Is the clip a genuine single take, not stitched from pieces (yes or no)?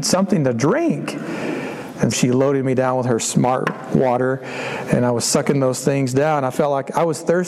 no